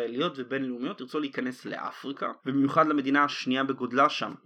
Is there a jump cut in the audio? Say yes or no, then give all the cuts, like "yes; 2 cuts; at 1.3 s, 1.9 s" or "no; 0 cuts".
yes; 1 cut; at 2.4 s